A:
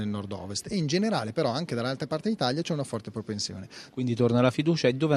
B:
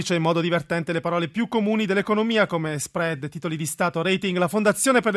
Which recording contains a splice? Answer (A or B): A